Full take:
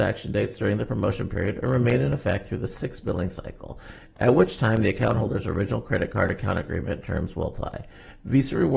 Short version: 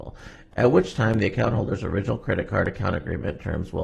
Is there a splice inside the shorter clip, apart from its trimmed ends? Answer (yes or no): no